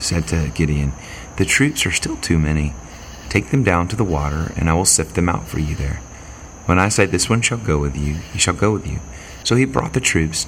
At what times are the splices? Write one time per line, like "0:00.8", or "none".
0:09.4